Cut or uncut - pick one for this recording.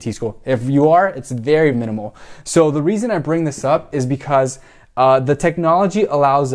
cut